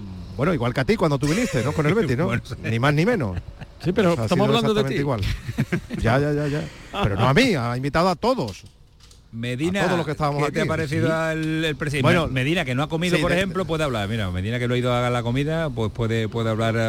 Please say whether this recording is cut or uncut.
uncut